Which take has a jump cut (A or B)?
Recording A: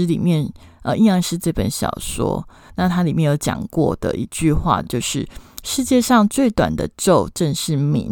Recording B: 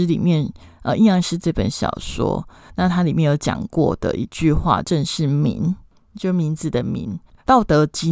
B